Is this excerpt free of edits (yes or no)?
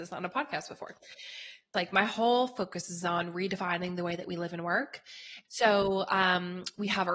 no